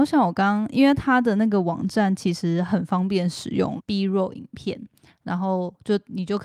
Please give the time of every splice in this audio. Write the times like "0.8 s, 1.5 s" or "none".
3.8 s